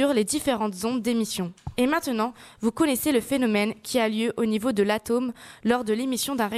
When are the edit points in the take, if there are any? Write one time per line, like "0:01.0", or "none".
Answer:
none